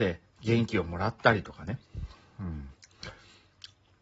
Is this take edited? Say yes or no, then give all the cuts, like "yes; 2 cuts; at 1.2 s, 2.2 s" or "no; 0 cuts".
no; 0 cuts